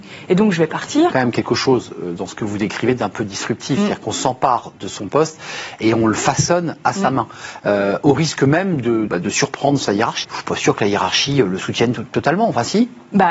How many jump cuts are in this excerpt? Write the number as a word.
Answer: three